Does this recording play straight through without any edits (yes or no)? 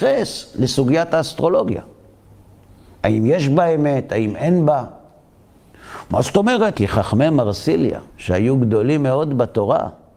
no